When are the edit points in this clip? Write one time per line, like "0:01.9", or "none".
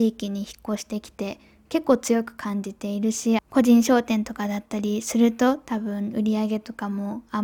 0:03.4